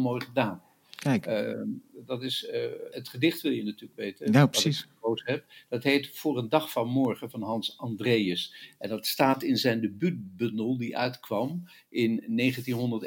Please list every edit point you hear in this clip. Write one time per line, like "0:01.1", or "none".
0:02.9